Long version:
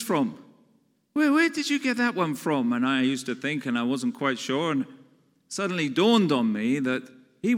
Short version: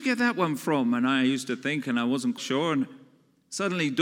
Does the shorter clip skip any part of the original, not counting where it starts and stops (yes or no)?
yes